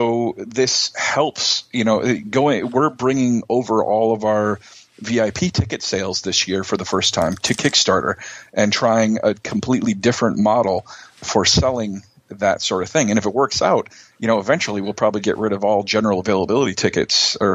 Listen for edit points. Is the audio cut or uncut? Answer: cut